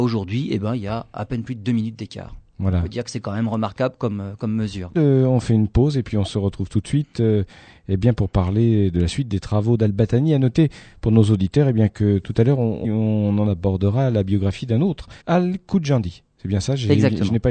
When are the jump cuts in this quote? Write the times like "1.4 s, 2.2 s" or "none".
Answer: 4.9 s, 12.8 s, 15.2 s